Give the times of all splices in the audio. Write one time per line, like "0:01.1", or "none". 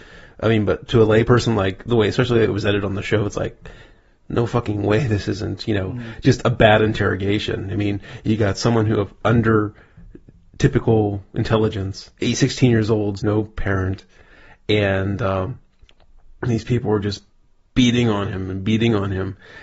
0:12.2
0:13.2